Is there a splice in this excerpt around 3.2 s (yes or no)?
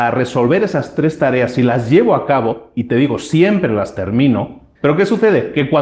no